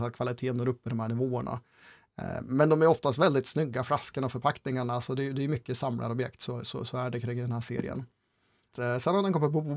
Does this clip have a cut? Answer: yes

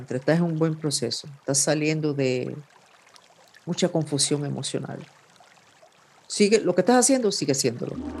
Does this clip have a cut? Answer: no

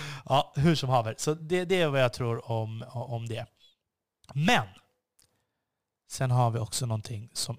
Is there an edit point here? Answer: no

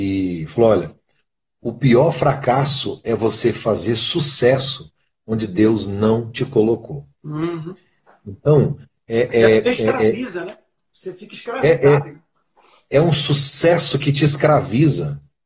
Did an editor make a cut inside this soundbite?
no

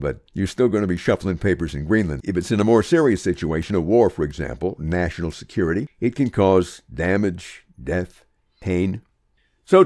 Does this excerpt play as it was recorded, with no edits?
yes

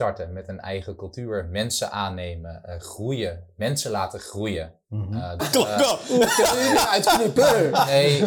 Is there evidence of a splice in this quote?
yes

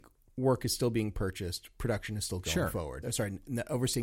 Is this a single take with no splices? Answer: no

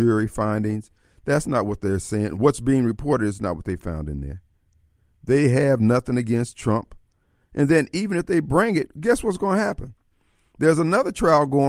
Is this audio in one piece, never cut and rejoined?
yes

